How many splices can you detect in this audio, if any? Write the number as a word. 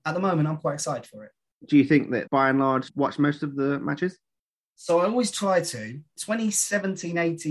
one